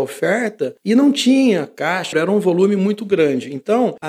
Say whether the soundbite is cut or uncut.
cut